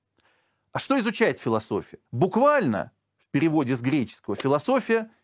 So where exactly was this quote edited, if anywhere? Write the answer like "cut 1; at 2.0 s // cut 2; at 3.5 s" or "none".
cut 1; at 2.1 s